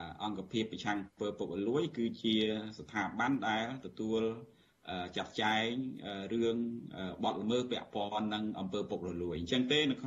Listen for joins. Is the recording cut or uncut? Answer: uncut